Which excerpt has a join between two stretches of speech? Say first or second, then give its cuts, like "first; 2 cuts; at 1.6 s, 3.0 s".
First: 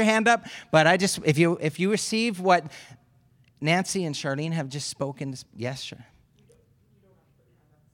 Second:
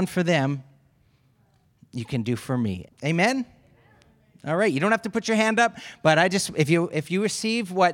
second; 1 cut; at 2.8 s